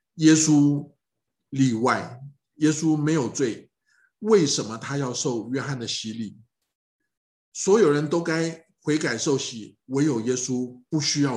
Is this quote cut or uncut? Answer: uncut